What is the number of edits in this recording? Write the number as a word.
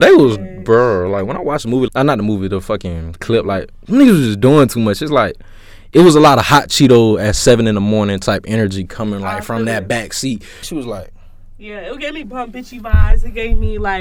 two